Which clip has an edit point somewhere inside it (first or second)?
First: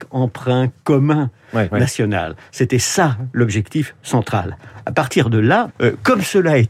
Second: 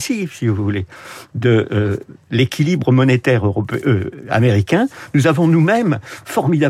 first